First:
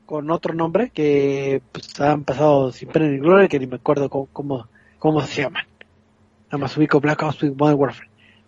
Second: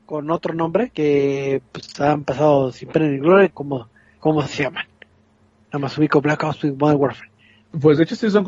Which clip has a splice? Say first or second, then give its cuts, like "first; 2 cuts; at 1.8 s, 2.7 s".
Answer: second; 1 cut; at 3.5 s